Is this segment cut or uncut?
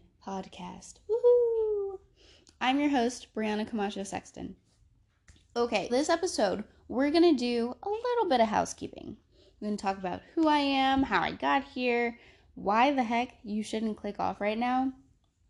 cut